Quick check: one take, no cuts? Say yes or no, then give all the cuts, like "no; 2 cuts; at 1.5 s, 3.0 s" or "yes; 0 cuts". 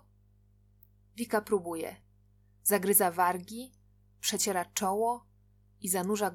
yes; 0 cuts